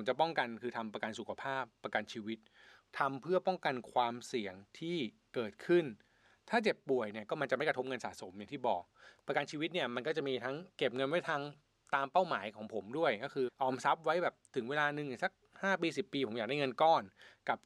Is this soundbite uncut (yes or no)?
no